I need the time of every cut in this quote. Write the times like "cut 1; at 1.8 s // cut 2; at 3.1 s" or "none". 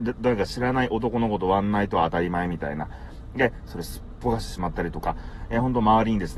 cut 1; at 3.6 s